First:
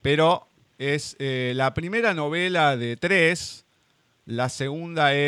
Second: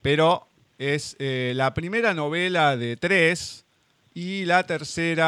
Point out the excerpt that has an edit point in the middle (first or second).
second